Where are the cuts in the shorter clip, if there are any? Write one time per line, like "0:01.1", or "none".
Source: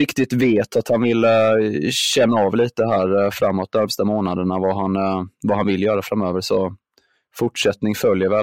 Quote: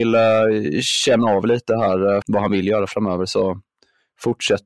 0:02.2